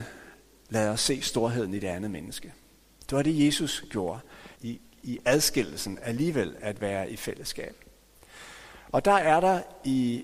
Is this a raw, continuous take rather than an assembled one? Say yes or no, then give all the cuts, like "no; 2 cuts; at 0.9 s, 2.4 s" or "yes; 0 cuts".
no; 1 cut; at 4.5 s